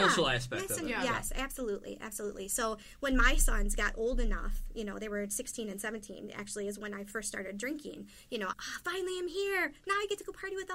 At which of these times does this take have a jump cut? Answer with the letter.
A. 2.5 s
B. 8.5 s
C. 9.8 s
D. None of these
B